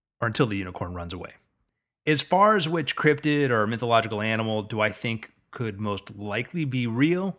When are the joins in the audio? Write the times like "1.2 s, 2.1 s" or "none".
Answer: none

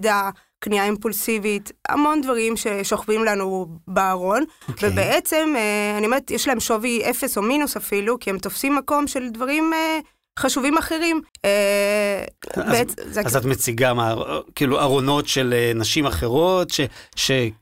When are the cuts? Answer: 11.3 s, 12.4 s

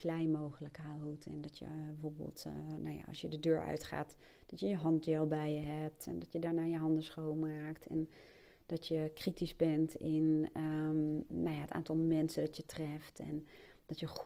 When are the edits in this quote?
none

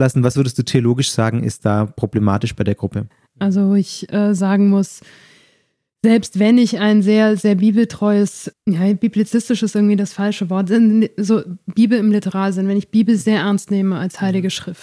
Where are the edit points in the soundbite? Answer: 3.3 s, 8.5 s

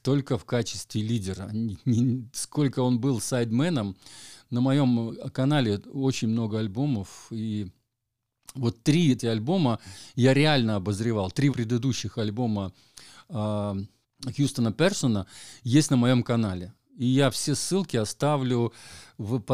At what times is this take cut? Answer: 9.2 s, 11.5 s, 14.0 s

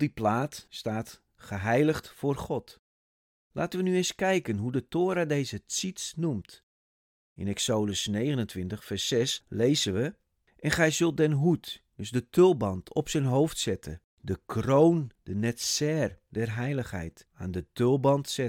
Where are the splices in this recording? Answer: 14.1 s, 17.3 s

